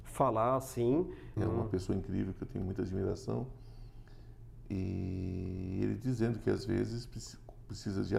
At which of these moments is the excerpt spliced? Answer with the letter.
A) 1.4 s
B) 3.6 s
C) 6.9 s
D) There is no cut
A